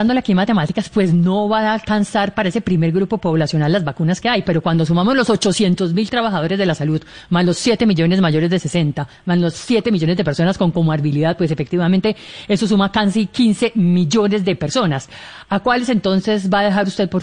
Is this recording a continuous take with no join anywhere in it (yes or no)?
no